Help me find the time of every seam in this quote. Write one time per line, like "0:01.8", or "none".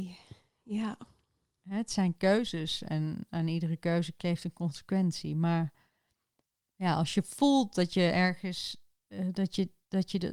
none